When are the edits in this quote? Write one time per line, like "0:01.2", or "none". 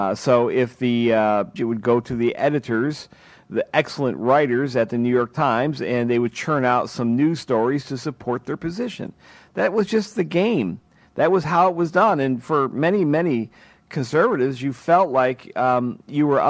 0:01.6